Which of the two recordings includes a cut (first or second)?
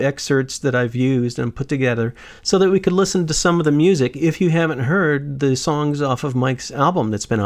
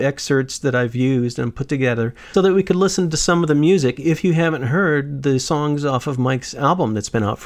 second